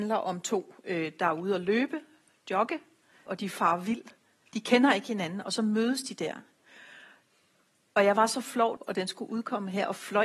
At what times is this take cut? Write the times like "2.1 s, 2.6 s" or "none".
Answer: 3.3 s, 8.8 s